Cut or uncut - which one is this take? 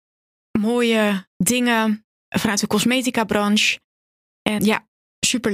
cut